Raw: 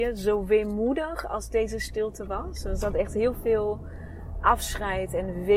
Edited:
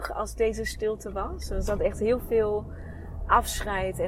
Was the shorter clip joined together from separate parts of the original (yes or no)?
no